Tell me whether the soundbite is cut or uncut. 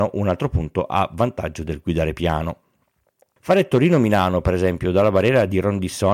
cut